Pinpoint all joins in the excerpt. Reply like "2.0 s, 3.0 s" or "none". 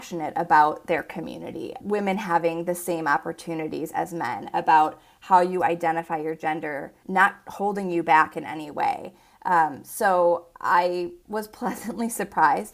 1.8 s, 7.0 s, 11.2 s